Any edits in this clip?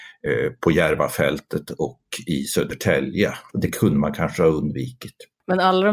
yes; 1 cut; at 3.5 s

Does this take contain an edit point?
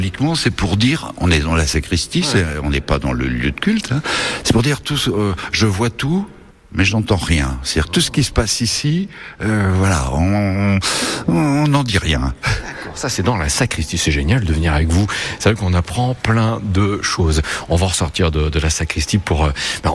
no; 0 cuts

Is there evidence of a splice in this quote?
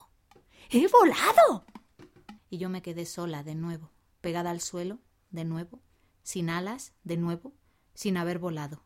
yes; 1 cut; at 2.4 s

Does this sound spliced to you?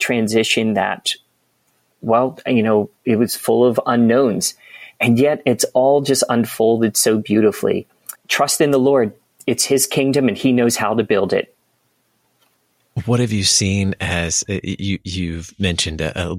yes; 1 cut; at 8.2 s

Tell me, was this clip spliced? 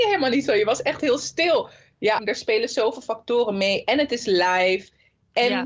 yes; 1 cut; at 2.2 s

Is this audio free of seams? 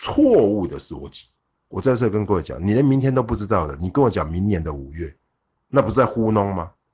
no; 1 cut; at 1.5 s

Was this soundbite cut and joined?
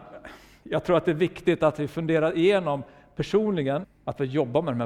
yes; 1 cut; at 3.8 s

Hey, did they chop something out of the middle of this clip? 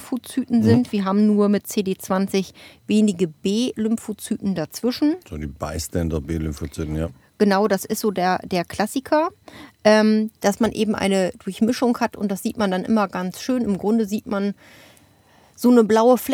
no; 0 cuts

